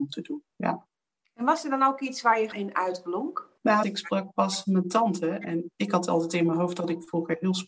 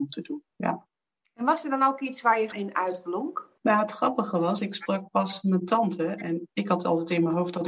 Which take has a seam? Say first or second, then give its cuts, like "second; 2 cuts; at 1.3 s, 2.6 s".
first; 1 cut; at 3.8 s